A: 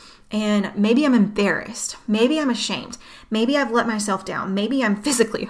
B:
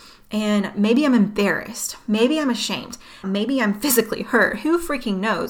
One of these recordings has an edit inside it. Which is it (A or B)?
B